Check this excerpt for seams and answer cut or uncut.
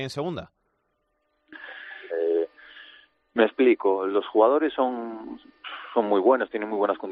cut